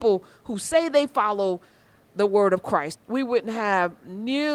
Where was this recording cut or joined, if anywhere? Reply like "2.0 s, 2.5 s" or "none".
2.9 s